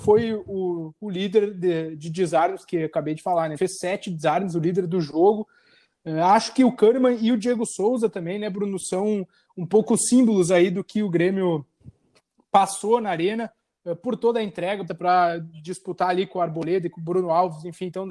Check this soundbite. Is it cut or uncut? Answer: cut